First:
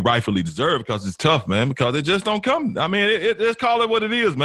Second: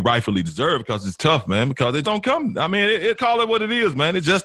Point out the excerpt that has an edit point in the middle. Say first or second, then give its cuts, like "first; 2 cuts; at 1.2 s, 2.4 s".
second; 2 cuts; at 2.0 s, 3.1 s